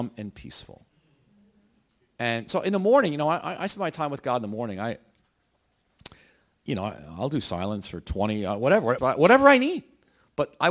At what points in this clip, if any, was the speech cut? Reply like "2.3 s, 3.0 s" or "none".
9.0 s